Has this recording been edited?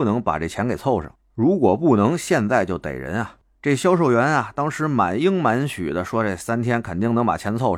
no; 0 cuts

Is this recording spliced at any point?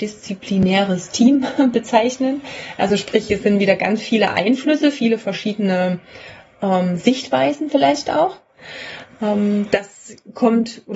no; 0 cuts

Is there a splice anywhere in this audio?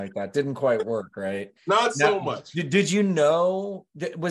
no; 0 cuts

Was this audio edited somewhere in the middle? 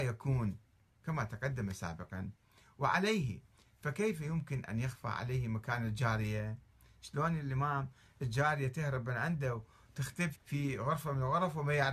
yes; 1 cut; at 10.3 s

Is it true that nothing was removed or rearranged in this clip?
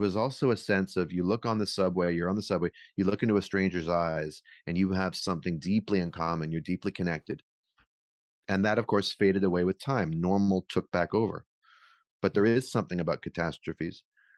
yes; 0 cuts

